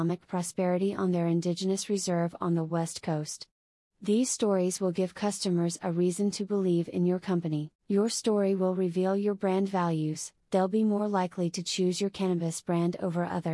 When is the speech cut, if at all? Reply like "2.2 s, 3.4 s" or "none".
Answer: 3.9 s, 7.8 s, 10.4 s